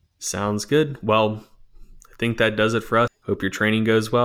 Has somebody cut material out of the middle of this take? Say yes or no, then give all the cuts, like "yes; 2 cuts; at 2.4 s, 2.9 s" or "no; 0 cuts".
yes; 1 cut; at 3.1 s